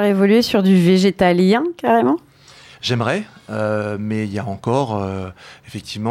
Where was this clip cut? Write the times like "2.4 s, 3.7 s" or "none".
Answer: none